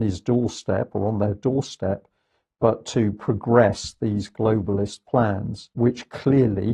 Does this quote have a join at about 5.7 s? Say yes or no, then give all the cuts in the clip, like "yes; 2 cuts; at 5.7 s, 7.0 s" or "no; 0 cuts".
yes; 1 cut; at 5.7 s